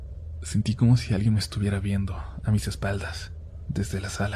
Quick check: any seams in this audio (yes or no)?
no